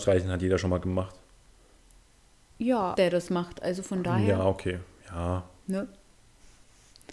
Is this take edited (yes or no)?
yes